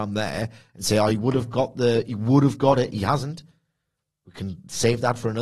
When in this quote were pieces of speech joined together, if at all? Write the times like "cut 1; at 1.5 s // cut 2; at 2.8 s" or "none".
none

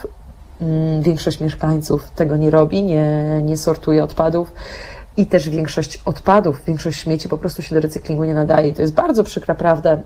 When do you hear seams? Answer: none

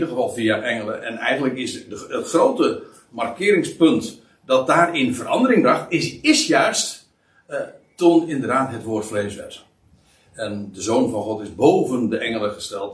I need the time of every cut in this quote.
none

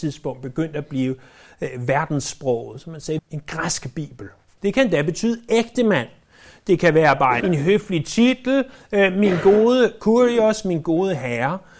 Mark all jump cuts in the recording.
cut 1; at 3.2 s // cut 2; at 4.6 s // cut 3; at 7.4 s

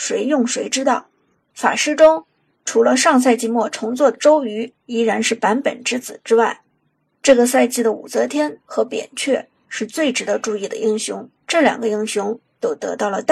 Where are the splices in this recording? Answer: cut 1; at 1.5 s // cut 2; at 11.4 s

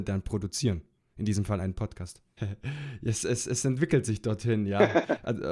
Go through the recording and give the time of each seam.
cut 1; at 2.4 s

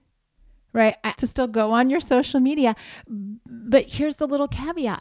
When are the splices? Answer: cut 1; at 1.2 s

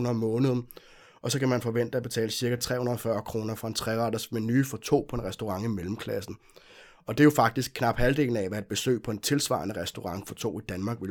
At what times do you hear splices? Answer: none

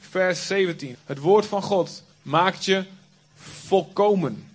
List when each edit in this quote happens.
cut 1; at 0.9 s // cut 2; at 2.1 s

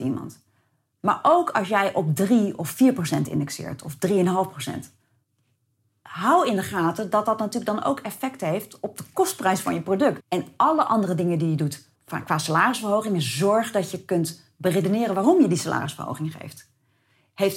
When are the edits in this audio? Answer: cut 1; at 10.2 s // cut 2; at 11.9 s

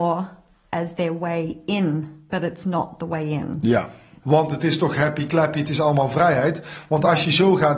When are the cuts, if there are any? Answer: cut 1; at 4.2 s

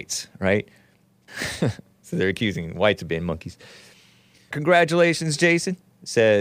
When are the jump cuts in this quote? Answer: cut 1; at 1.3 s // cut 2; at 4.5 s

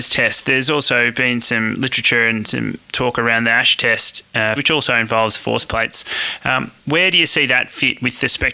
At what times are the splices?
cut 1; at 4.6 s

